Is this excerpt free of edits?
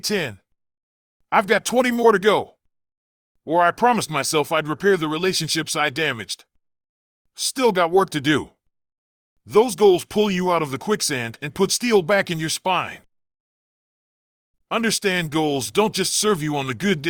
yes; 0 cuts

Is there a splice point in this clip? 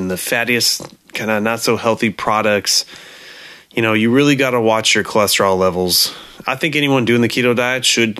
no; 0 cuts

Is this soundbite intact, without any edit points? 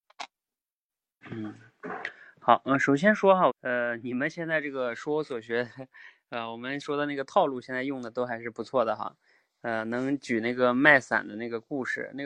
no; 2 cuts; at 1.2 s, 3.5 s

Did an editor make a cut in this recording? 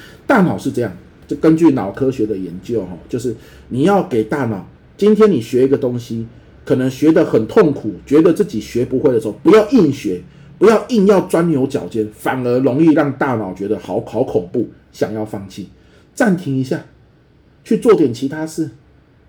no; 0 cuts

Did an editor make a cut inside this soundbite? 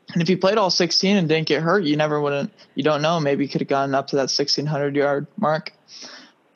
no; 0 cuts

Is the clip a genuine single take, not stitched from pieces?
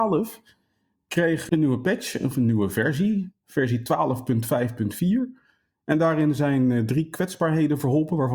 yes; 0 cuts

